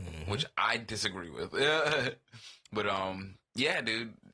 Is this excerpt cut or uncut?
uncut